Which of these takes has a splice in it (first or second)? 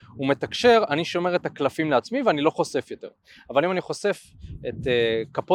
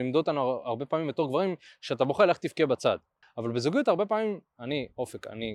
second